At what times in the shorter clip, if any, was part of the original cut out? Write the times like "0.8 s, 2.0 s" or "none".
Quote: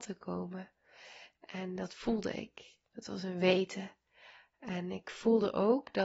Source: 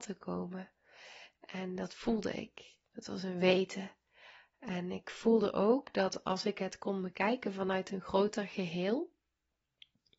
none